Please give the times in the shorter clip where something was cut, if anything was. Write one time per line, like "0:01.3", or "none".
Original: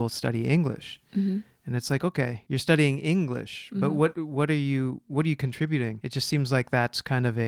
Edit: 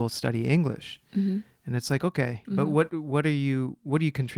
0:02.4

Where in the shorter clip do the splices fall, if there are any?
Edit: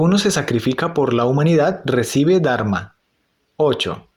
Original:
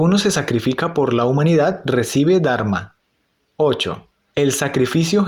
none

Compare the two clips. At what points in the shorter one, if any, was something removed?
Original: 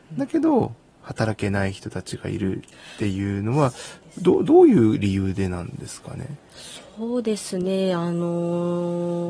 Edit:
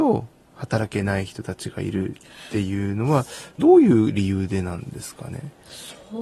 0:03.6

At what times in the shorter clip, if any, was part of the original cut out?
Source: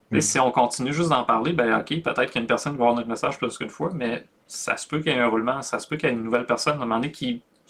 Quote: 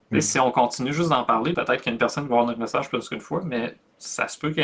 0:01.5

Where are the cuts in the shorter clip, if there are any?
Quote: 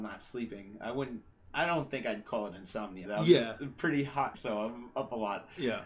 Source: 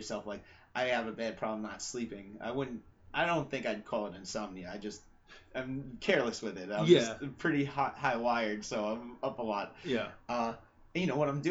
0:03.1
0:04.3

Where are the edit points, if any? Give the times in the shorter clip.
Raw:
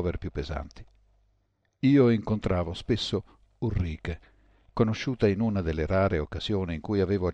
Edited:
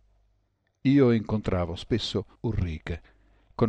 0:02.4

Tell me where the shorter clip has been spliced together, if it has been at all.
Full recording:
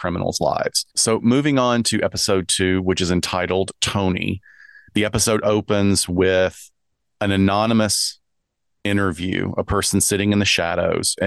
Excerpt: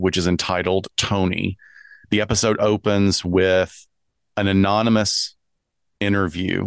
none

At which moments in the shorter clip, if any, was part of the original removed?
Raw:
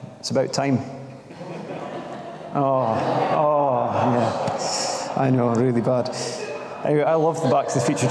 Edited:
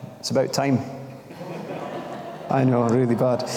0:02.5

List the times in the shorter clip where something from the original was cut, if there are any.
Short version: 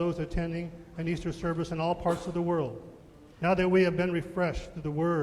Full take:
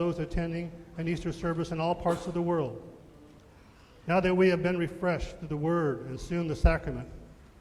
0:03.3

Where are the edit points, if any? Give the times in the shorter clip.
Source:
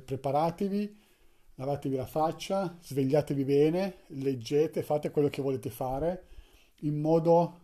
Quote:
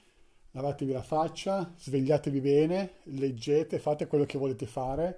none

